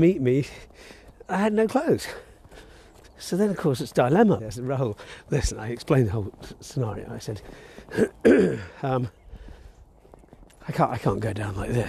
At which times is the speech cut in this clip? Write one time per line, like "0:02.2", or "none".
0:04.4